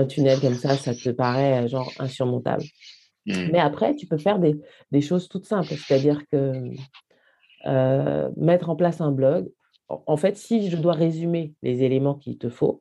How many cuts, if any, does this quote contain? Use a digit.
0